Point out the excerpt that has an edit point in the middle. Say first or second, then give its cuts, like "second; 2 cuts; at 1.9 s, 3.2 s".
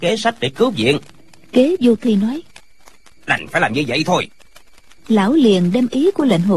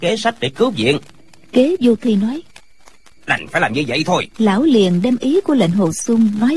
second; 1 cut; at 4.3 s